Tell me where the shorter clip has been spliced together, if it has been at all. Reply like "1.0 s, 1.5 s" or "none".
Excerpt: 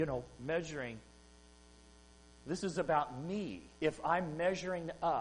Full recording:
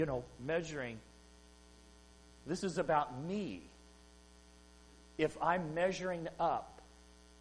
3.7 s